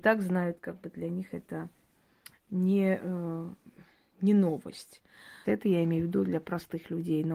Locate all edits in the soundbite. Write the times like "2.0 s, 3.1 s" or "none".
5.4 s

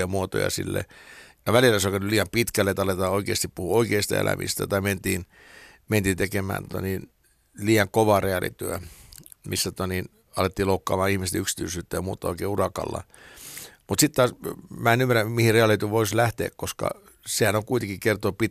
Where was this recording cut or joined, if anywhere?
none

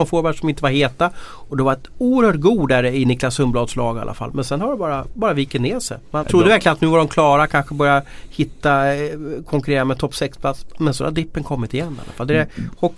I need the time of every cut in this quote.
6.2 s

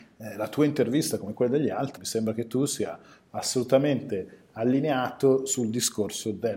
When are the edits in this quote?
2.0 s

